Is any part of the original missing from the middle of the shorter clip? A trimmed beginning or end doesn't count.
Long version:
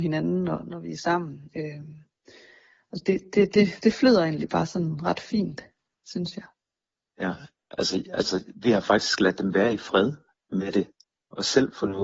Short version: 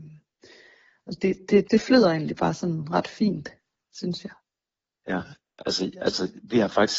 yes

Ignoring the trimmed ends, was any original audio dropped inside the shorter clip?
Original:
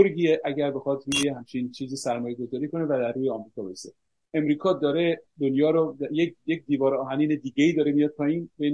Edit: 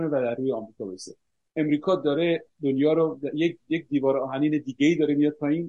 no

